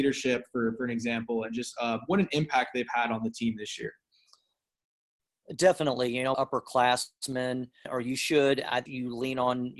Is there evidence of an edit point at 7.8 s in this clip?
yes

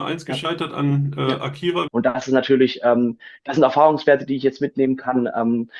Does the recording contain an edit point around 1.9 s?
yes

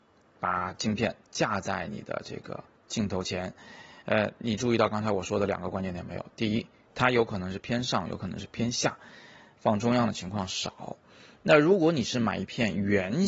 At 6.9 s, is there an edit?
yes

